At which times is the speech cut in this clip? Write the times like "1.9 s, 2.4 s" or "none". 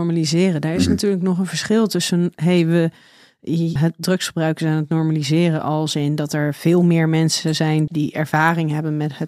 3.8 s, 7.9 s